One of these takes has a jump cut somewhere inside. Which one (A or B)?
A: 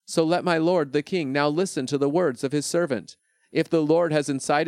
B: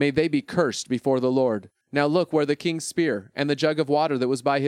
B